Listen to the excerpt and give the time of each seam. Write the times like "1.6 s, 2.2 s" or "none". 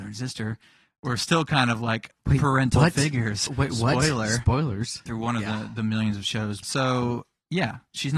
3.5 s, 5.1 s, 6.6 s